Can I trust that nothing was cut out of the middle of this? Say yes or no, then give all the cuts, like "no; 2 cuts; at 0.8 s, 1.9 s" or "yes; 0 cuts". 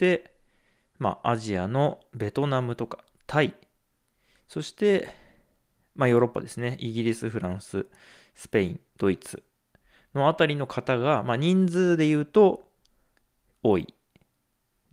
yes; 0 cuts